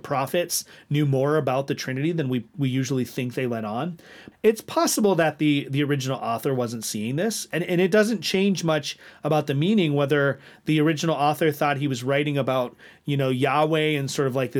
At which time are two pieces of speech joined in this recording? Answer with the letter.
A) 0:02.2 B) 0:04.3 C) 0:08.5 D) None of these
B